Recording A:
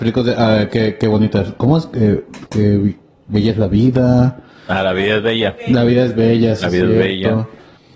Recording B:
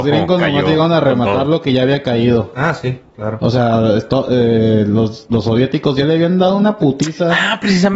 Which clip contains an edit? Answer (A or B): A